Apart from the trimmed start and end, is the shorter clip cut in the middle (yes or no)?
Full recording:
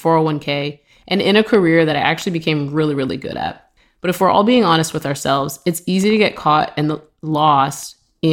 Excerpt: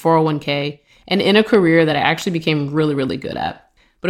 no